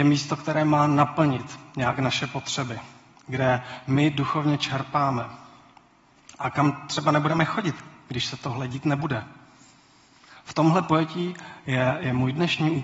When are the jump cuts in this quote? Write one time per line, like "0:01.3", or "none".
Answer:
none

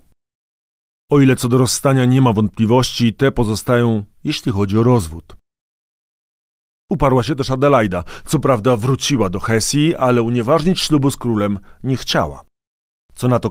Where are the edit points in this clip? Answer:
none

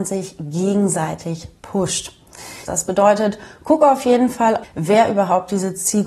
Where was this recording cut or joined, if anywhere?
0:02.7
0:04.6

